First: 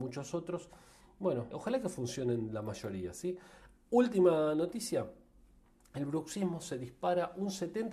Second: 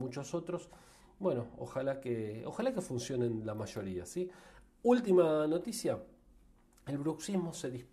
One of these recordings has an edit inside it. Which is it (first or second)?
first